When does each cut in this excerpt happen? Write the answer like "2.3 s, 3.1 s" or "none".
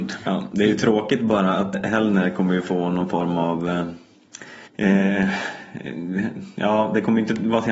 1.7 s, 4.7 s